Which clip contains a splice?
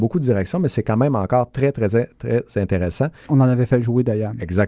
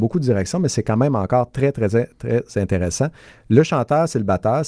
first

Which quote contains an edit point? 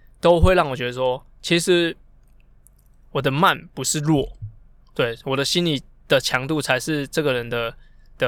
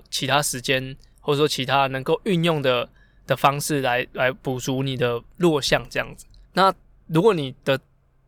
second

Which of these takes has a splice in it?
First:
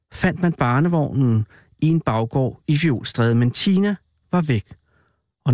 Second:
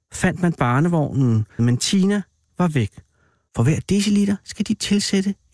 second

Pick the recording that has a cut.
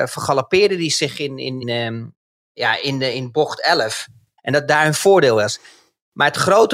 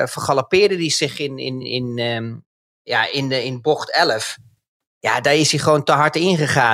first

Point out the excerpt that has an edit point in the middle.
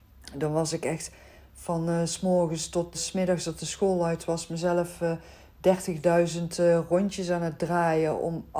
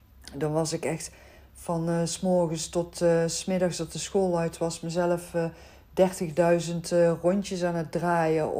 first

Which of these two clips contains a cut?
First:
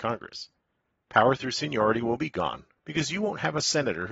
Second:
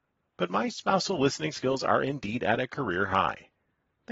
first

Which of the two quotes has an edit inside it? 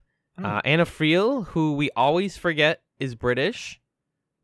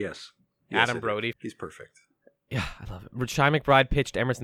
second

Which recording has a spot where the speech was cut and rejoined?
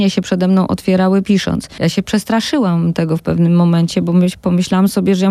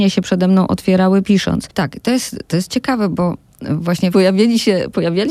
second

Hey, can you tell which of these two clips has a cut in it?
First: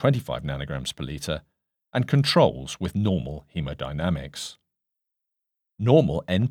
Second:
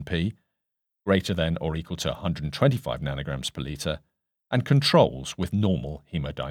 first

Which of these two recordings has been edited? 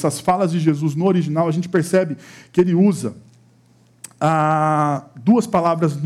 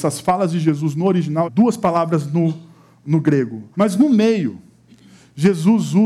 second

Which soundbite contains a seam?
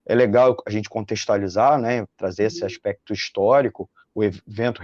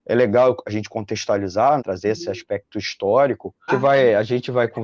second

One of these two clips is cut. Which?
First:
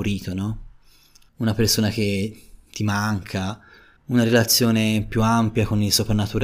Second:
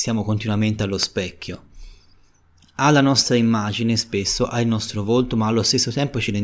first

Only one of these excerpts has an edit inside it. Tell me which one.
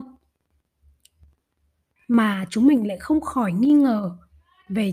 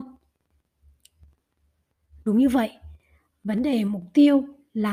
first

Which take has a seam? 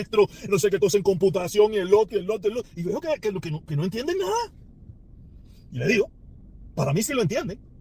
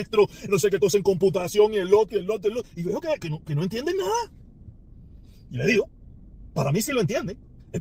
second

